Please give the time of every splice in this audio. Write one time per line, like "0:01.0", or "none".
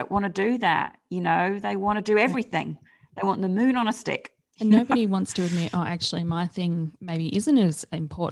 none